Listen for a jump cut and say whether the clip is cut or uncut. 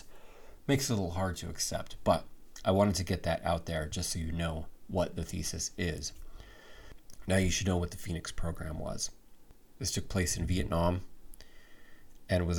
uncut